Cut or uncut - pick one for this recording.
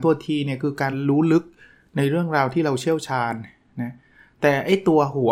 uncut